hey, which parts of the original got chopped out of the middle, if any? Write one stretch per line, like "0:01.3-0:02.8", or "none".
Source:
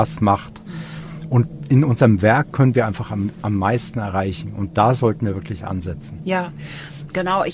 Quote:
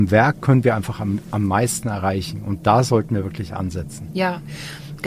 none